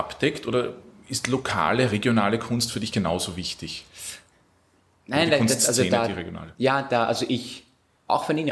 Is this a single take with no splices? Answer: yes; 0 cuts

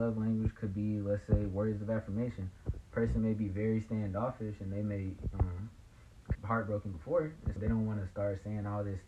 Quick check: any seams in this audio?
yes; 2 cuts; at 6.4 s, 7.6 s

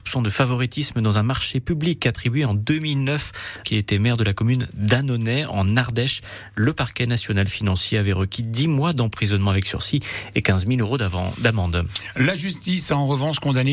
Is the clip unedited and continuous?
no; 1 cut; at 3.6 s

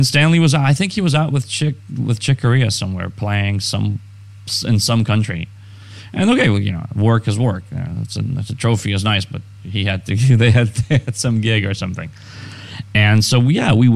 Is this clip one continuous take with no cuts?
yes; 0 cuts

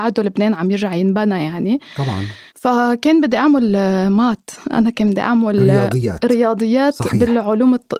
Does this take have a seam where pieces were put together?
yes; 1 cut; at 2.5 s

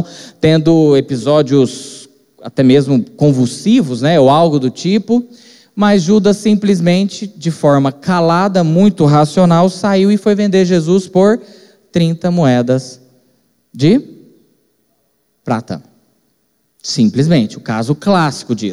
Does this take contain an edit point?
no; 0 cuts

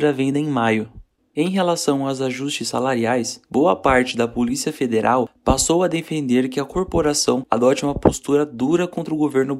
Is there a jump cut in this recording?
yes; 2 cuts; at 1.2 s, 3.4 s

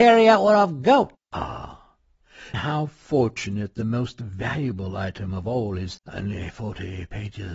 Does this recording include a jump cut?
yes; 2 cuts; at 1.2 s, 2.5 s

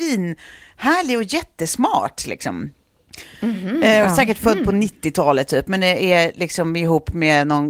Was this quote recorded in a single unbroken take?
yes; 0 cuts

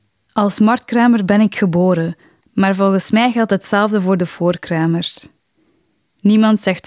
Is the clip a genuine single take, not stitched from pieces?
no; 1 cut; at 2.4 s

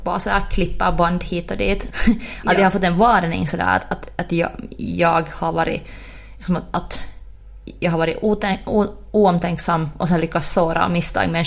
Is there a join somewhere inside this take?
yes; 1 cut; at 1.9 s

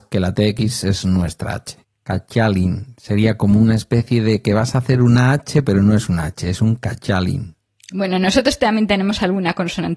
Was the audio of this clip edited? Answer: yes; 1 cut; at 1.8 s

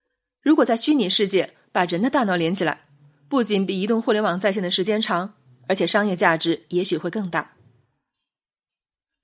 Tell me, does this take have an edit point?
no; 0 cuts

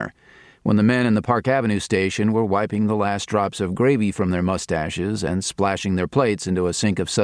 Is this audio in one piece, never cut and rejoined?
yes; 0 cuts

